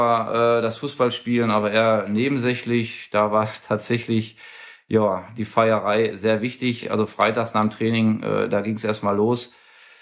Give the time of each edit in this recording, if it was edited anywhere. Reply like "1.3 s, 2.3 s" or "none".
none